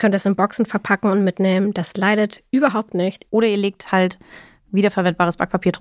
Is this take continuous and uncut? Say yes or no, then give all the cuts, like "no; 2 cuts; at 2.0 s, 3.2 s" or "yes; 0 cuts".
no; 1 cut; at 3.3 s